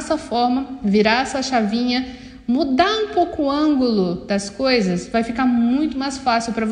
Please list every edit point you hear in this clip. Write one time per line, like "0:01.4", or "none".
none